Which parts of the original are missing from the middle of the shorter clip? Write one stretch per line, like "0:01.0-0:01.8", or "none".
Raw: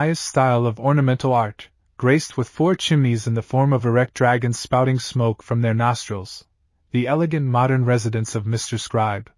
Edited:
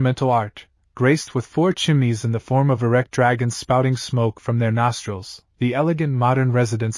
0:06.5-0:06.8